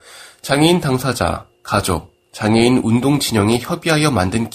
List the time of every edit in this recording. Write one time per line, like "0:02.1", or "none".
none

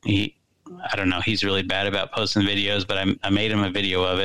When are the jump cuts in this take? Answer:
none

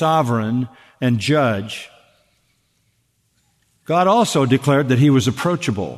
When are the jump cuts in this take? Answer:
none

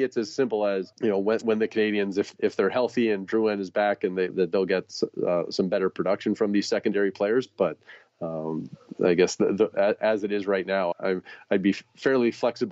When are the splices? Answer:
0:04.3
0:10.9

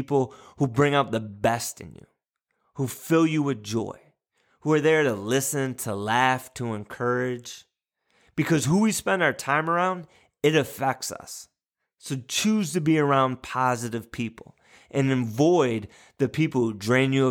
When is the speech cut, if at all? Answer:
none

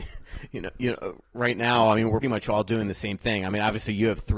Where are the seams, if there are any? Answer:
0:02.2

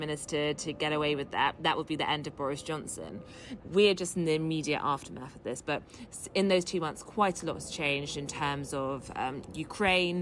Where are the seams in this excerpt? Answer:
none

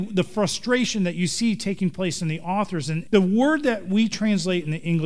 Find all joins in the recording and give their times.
0:03.0

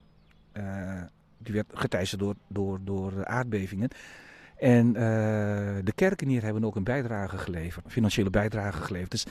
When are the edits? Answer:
0:07.9

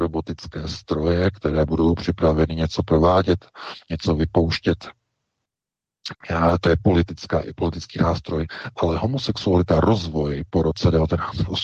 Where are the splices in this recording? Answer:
0:06.1

